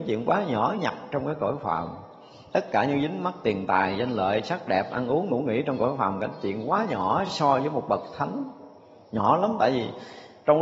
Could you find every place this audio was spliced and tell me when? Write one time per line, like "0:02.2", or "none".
none